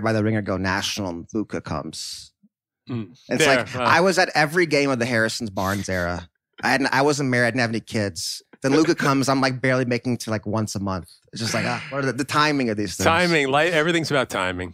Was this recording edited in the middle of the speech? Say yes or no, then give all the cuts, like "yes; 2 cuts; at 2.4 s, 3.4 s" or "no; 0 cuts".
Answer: no; 0 cuts